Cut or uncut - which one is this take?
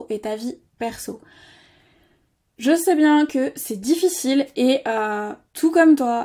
uncut